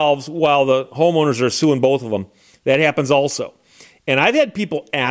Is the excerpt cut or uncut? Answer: uncut